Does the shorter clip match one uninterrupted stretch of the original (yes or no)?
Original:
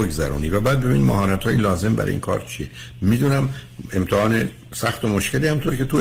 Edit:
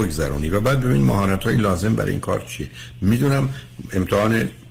yes